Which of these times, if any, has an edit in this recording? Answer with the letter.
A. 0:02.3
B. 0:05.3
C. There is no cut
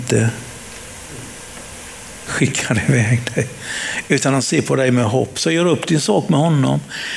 C